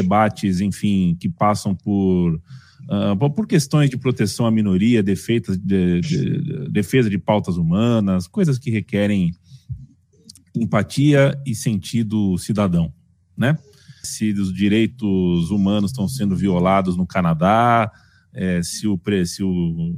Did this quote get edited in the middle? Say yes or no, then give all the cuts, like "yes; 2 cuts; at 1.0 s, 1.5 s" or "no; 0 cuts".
yes; 1 cut; at 14.0 s